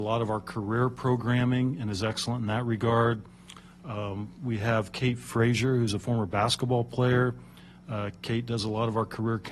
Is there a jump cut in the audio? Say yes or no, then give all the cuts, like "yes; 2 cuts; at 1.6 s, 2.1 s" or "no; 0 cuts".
no; 0 cuts